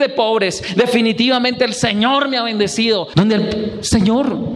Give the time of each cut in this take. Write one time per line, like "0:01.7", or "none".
0:03.1